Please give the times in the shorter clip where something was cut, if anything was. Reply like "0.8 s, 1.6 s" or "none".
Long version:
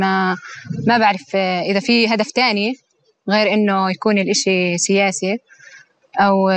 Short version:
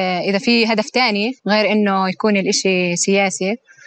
1.4 s